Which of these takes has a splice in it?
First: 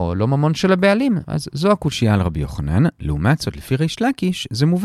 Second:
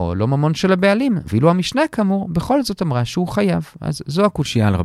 first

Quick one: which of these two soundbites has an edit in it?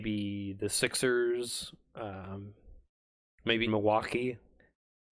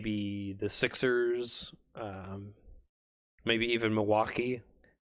first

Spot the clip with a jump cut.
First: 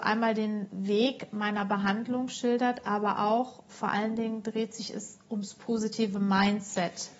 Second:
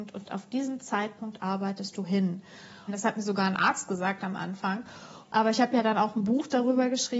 second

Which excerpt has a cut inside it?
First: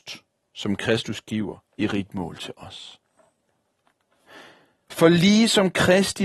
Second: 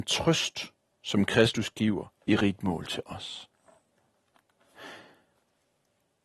first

